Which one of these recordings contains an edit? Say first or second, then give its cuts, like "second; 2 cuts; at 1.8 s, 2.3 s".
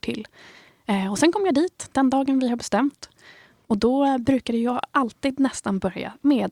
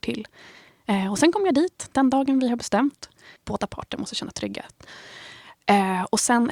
second; 1 cut; at 3.4 s